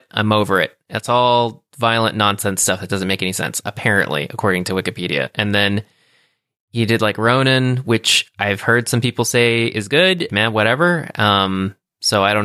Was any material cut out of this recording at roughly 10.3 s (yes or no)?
yes